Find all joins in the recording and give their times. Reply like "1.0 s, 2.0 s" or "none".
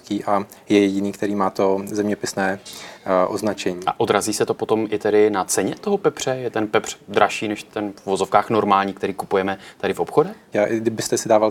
10.5 s